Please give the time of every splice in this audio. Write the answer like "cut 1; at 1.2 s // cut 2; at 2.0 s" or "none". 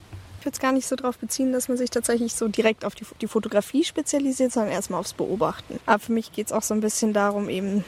cut 1; at 5.8 s